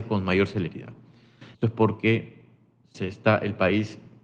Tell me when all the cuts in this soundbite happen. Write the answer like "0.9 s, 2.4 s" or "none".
1.5 s